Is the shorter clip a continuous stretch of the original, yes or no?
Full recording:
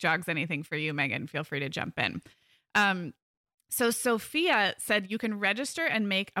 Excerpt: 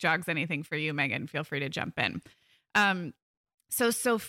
yes